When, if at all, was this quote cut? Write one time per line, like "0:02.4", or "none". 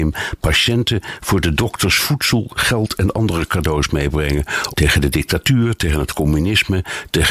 0:04.7